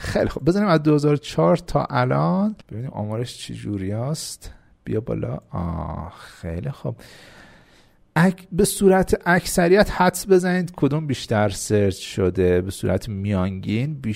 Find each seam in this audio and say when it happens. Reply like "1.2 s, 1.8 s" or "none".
2.6 s